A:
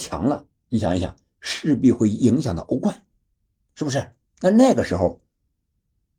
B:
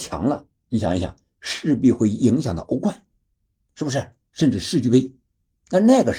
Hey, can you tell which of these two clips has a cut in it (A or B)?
A